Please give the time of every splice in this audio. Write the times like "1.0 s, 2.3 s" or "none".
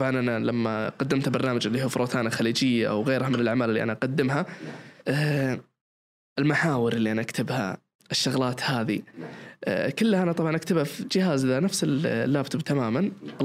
5.0 s